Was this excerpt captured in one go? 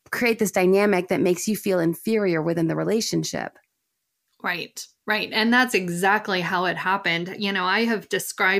yes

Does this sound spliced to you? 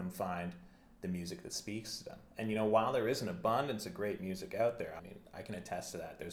yes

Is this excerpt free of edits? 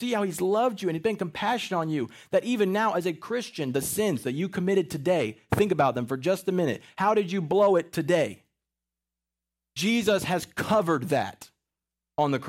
yes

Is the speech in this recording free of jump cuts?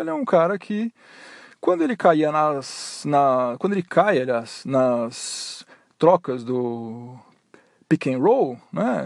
yes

